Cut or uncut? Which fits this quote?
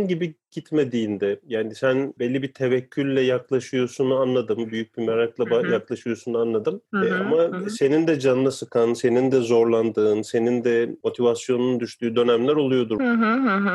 uncut